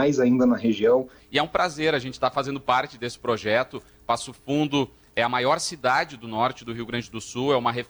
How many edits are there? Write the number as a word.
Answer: one